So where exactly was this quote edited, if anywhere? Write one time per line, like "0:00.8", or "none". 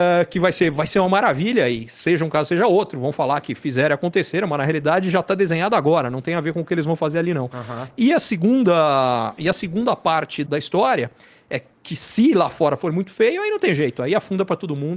0:10.5

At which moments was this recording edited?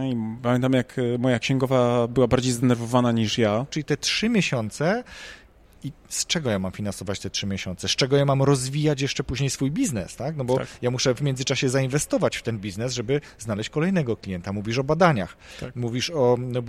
0:03.7
0:05.6

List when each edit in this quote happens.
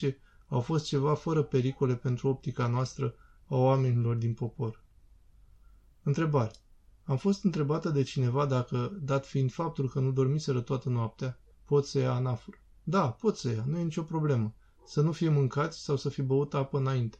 0:11.5
0:12.8

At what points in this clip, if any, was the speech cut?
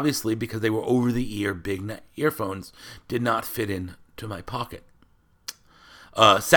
none

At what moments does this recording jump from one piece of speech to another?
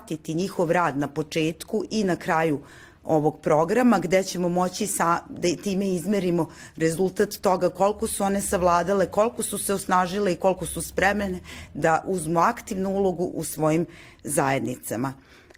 none

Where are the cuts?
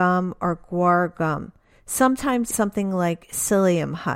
0:02.5

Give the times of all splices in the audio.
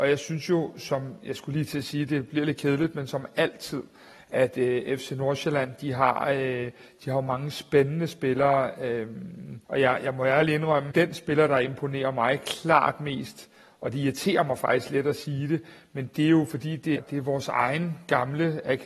0:09.6
0:10.9
0:17.0

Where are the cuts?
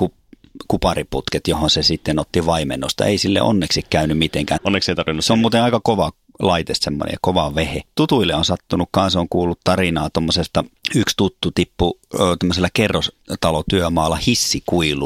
0:04.6

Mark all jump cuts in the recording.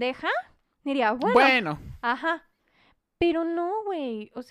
none

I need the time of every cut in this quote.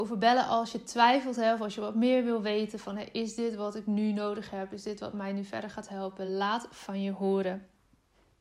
none

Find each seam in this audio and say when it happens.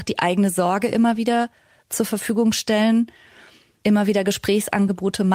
none

